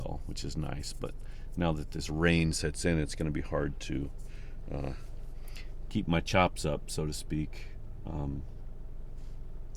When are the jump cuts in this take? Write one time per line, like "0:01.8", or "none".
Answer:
none